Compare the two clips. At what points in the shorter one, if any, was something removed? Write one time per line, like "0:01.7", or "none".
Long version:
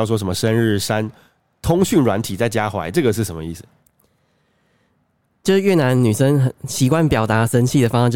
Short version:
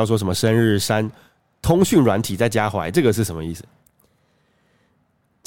none